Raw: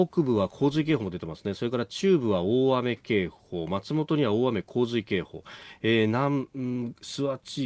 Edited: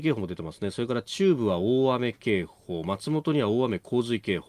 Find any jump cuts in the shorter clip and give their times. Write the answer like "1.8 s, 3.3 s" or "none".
none